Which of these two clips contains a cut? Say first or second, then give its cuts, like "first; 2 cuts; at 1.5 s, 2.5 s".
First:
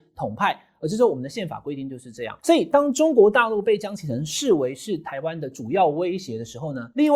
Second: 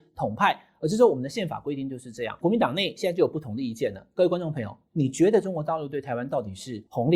second; 1 cut; at 2.4 s